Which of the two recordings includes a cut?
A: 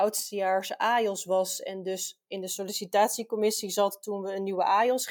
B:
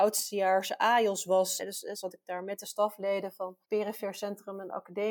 B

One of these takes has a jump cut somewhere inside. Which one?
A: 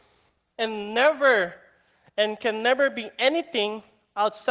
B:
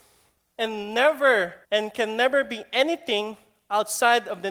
B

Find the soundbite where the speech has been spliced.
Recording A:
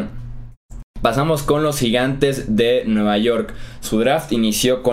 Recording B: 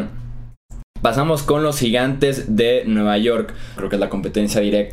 B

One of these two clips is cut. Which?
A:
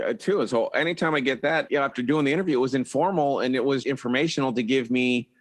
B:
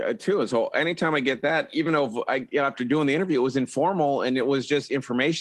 A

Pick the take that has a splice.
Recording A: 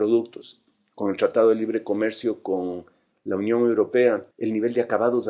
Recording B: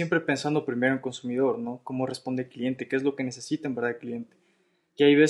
A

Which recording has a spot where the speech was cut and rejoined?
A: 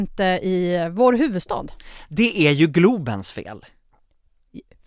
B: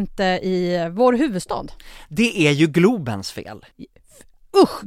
B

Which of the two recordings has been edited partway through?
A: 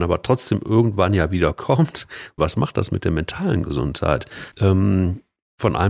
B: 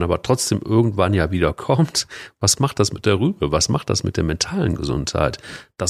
A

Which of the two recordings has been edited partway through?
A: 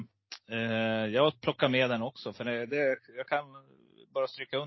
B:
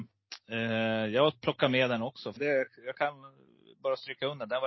B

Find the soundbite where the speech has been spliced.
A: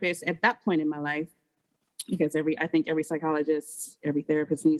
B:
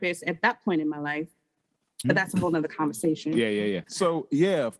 B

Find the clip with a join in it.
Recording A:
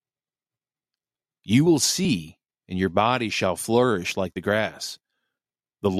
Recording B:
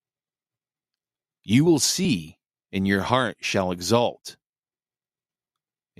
A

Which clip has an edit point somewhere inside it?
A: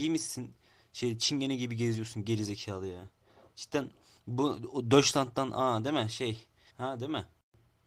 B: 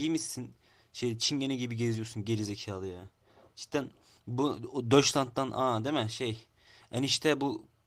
A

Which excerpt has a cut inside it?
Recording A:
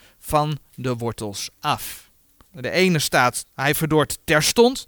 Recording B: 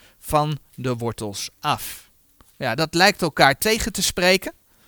A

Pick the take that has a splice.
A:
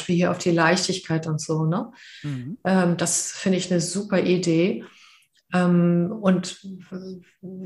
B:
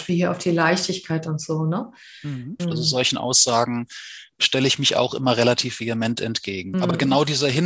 B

